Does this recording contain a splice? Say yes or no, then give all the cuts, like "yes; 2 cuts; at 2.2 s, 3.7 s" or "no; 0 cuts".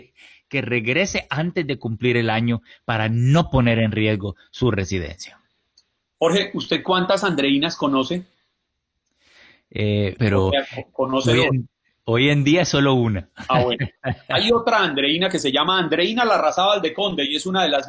yes; 1 cut; at 10.2 s